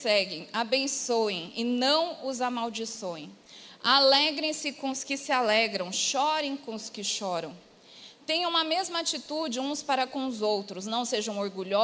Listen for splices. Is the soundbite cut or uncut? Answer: uncut